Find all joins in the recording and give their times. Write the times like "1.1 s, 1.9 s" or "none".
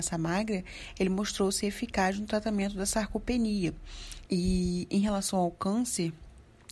4.3 s